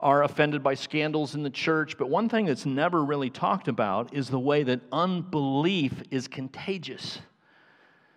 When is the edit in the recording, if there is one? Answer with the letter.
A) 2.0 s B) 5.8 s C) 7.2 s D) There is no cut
D